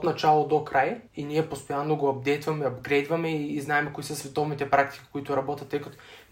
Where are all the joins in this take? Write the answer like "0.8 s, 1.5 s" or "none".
1.1 s